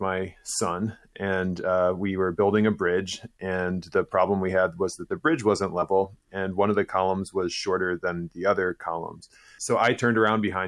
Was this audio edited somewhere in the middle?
no; 0 cuts

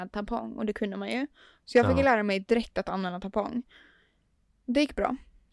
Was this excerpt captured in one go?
yes; 0 cuts

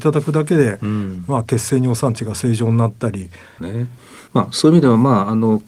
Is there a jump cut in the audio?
yes; 1 cut; at 3.6 s

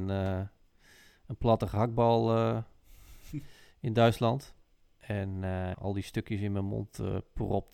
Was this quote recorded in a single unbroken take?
no; 1 cut; at 5.7 s

